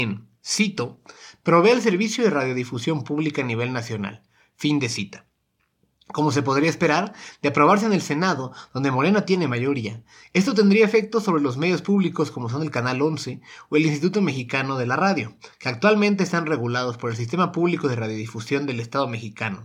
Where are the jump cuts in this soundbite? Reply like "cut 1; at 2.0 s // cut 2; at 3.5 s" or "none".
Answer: none